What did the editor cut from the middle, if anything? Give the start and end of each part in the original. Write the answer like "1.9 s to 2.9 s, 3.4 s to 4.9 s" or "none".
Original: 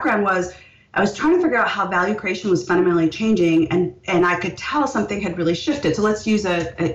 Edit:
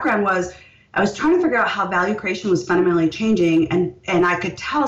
none